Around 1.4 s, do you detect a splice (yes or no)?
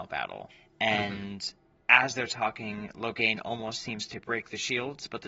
no